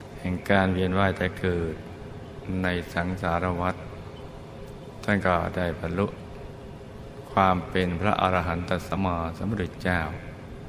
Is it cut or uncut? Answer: cut